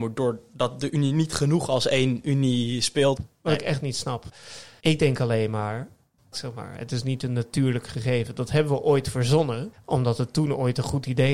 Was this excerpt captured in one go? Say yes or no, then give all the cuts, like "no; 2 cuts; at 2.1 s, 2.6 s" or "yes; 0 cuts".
no; 2 cuts; at 3.2 s, 6.3 s